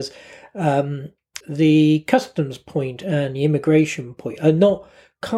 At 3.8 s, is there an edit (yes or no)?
no